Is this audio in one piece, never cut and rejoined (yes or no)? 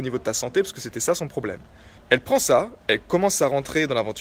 no